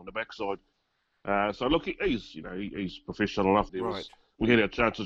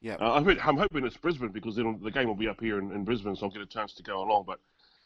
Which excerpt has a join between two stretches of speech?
first; 1 cut; at 3.7 s

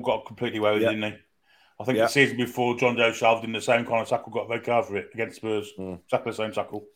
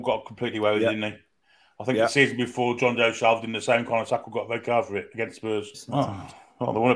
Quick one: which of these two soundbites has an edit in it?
second; 1 cut; at 5.7 s

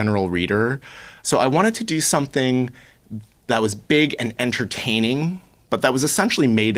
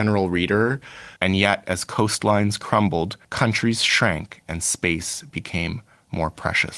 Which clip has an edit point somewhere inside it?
second; 2 cuts; at 1.2 s, 3.2 s

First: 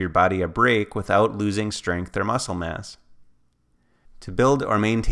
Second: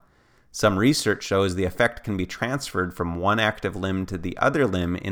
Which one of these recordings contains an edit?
first; 1 cut; at 4.1 s

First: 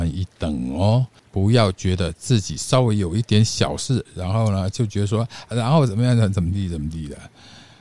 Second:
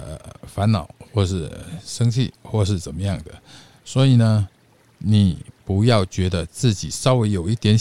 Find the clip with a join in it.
first; 3 cuts; at 1.2 s, 4.1 s, 5.5 s

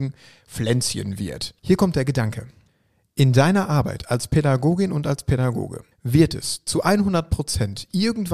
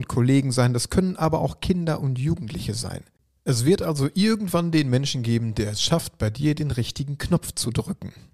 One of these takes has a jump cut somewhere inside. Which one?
first; 2 cuts; at 1.6 s, 5.9 s

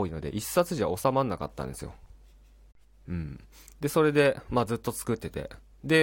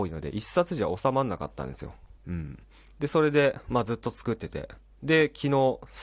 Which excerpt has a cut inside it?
second; 1 cut; at 2.2 s

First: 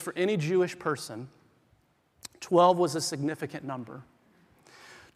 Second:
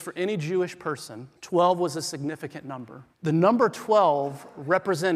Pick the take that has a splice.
second; 2 cuts; at 1.4 s, 3.1 s

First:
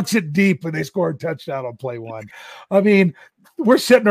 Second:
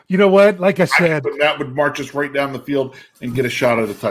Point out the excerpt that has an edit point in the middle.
second; 1 cut; at 1.2 s

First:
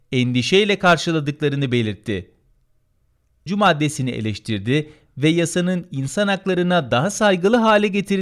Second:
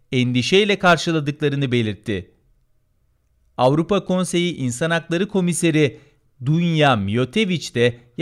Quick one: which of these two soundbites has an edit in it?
first; 1 cut; at 3.5 s

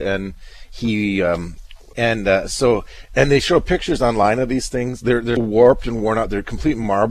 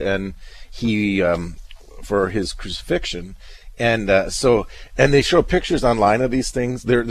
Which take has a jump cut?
first; 2 cuts; at 1.9 s, 5.4 s

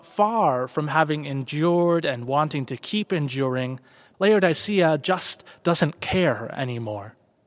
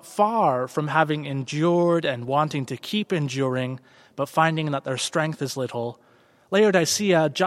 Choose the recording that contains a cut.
first; 1 cut; at 4.1 s

